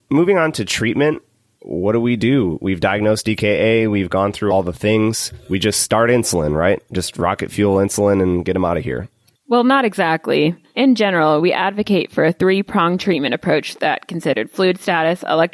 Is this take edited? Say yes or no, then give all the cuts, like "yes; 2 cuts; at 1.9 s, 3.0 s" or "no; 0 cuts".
no; 0 cuts